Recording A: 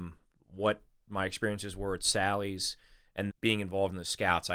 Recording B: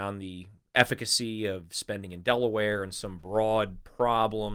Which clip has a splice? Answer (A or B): A